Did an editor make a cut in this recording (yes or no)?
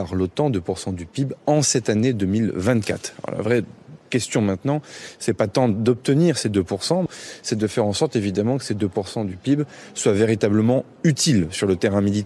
no